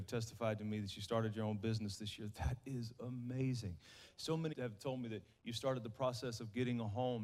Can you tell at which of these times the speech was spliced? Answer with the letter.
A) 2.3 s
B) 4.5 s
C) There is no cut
B